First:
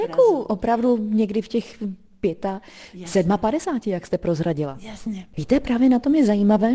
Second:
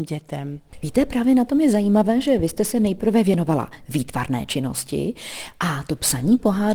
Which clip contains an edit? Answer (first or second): first